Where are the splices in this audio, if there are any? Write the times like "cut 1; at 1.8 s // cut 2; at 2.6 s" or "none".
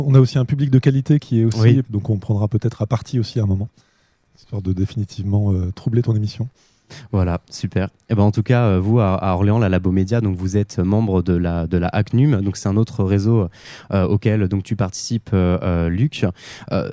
cut 1; at 1.8 s